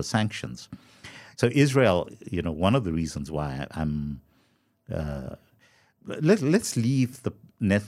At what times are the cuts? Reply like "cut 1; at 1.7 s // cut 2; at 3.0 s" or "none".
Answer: cut 1; at 1.3 s